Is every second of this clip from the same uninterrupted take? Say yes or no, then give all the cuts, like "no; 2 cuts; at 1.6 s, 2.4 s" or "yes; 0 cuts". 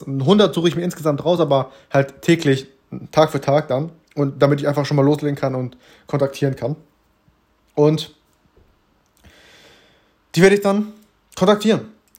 yes; 0 cuts